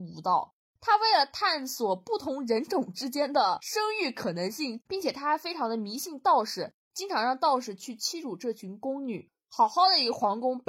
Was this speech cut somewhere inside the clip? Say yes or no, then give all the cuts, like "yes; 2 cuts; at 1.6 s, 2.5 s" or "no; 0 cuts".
yes; 1 cut; at 4.8 s